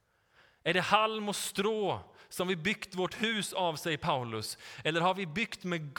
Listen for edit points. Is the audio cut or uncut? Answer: uncut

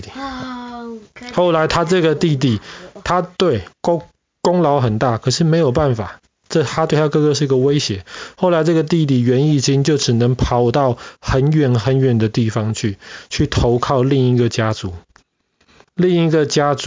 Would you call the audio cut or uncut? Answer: uncut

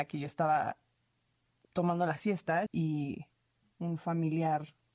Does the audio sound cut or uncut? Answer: cut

